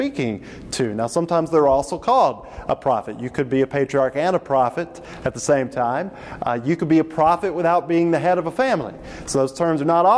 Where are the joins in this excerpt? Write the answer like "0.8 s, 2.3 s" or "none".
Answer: none